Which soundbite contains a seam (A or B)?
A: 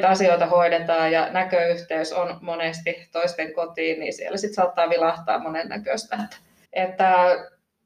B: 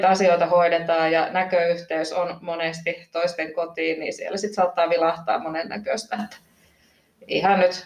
A